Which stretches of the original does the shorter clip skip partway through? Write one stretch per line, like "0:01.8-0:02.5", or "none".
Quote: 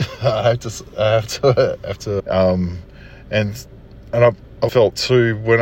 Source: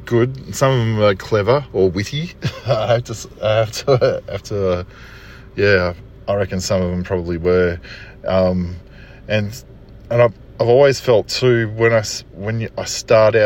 0:04.6-0:08.2
0:10.7-0:11.0